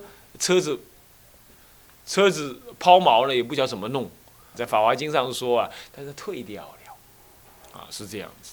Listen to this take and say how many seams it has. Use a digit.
2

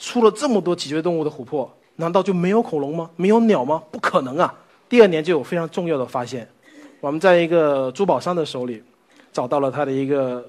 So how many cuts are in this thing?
1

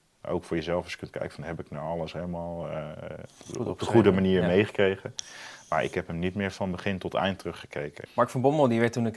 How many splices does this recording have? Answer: 1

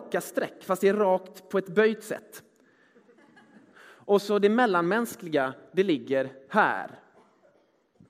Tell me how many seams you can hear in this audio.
1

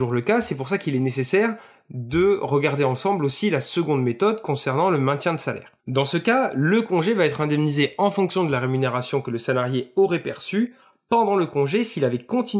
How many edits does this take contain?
1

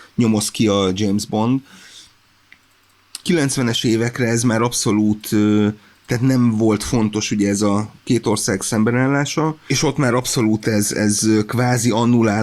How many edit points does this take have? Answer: 1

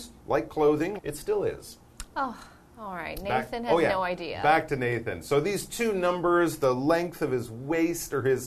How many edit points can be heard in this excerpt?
1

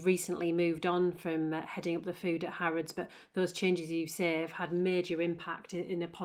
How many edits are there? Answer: 0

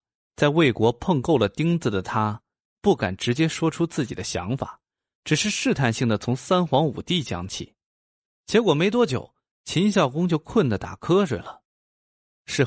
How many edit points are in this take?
0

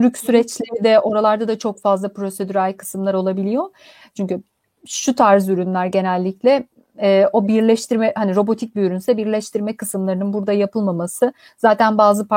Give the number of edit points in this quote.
1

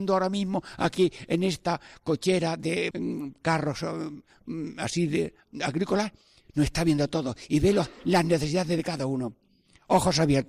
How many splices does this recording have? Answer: 1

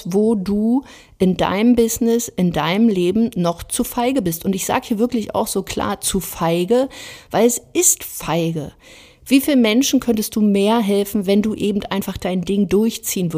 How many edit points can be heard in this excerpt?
0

